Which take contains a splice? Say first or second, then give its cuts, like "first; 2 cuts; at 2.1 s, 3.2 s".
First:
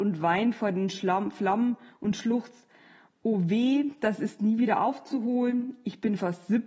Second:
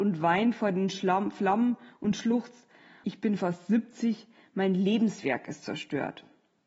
second; 1 cut; at 3.0 s